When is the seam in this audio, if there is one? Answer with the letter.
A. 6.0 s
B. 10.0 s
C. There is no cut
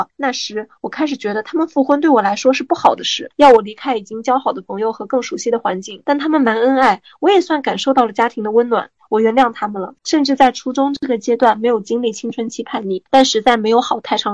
B